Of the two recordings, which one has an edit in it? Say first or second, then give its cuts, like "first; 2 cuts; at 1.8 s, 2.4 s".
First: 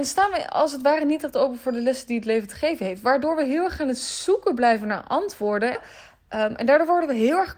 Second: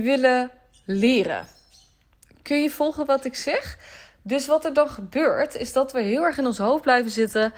first; 1 cut; at 5.7 s